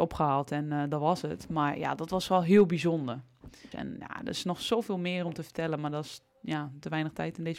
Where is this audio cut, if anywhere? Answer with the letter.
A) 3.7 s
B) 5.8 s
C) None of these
A